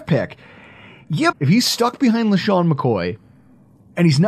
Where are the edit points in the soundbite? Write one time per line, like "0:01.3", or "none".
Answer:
0:01.3

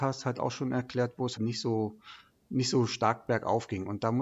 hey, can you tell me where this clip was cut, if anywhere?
0:01.4

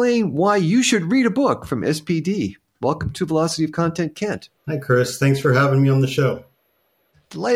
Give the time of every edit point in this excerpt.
0:04.6

